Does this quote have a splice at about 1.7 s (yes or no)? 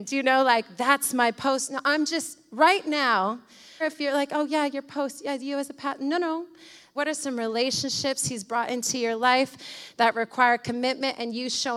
no